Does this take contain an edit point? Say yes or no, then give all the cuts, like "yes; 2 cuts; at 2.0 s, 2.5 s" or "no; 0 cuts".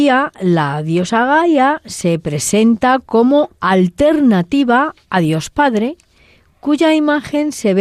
yes; 1 cut; at 5.0 s